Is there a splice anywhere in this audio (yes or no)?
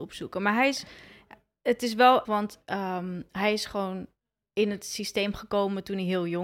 yes